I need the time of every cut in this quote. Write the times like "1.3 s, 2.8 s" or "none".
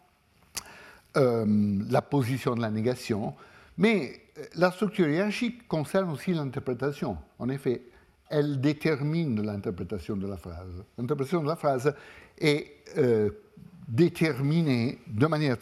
none